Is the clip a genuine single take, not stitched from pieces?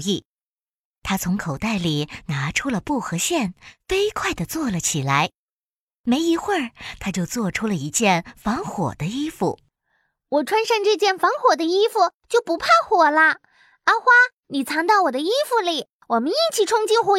yes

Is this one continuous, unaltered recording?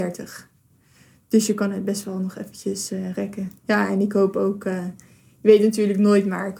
yes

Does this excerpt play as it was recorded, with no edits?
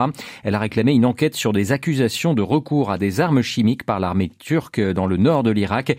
yes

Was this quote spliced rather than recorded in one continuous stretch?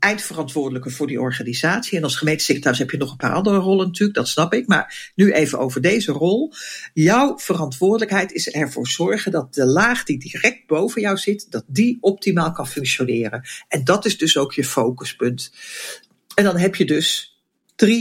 no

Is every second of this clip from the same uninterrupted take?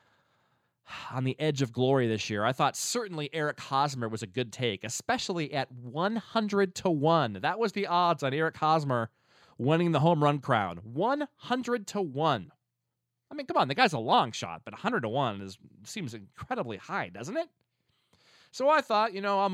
yes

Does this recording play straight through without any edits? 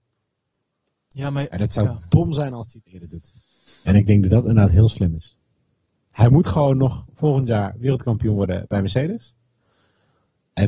no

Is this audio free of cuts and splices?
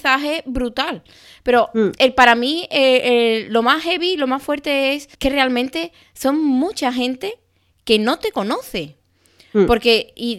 no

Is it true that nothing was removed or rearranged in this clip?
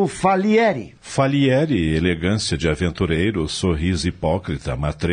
no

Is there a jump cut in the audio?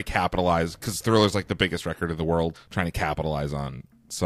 yes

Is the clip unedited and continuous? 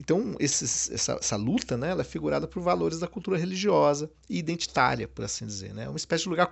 yes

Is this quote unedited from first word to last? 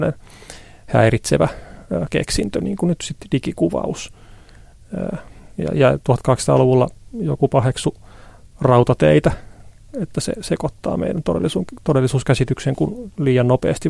yes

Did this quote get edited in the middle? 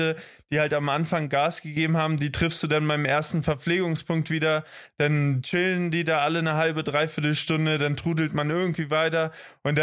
no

